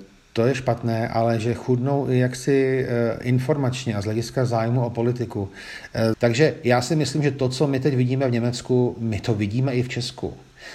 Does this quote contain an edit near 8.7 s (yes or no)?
no